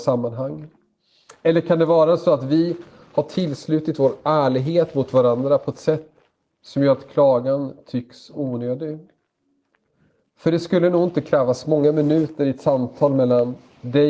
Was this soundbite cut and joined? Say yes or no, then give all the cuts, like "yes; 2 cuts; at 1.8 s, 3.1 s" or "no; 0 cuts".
no; 0 cuts